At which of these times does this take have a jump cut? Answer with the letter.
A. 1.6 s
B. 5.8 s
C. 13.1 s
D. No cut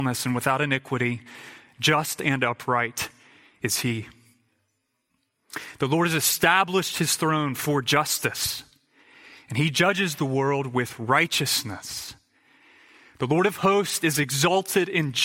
D